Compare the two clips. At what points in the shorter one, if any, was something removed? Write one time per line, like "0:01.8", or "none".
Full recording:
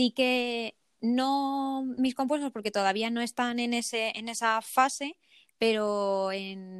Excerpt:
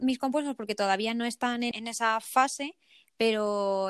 0:01.7